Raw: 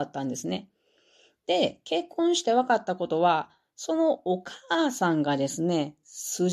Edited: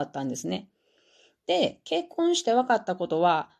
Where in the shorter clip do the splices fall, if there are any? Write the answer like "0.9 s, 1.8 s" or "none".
none